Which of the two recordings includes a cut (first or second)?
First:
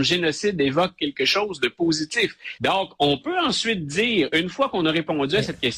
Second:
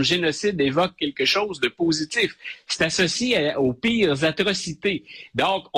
first